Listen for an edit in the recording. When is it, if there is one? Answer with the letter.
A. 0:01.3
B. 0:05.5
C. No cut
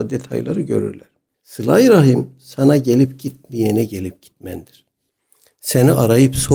A